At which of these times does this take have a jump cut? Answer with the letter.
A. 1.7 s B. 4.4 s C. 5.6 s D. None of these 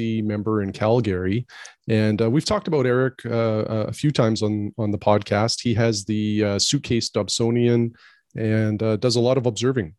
D